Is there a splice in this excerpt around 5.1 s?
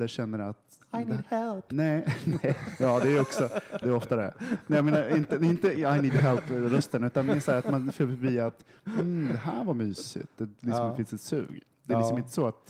no; 1 cut; at 3.8 s

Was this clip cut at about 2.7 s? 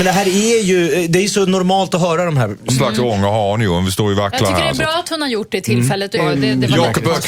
yes; 2 cuts; at 2.7 s, 6.2 s

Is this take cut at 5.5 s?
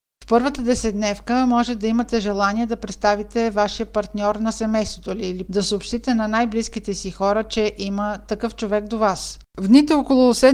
yes; 1 cut; at 5.5 s

